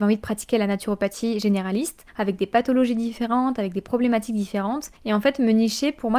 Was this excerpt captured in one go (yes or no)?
no